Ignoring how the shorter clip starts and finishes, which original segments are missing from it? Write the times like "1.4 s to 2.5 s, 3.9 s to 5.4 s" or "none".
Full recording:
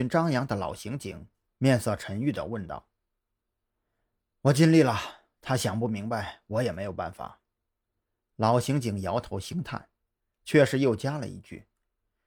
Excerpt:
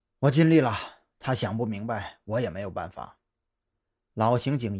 none